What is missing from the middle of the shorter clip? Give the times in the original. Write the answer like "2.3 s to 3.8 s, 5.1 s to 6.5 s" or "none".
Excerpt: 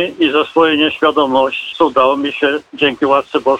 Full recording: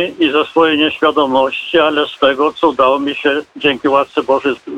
1.7 s to 2.5 s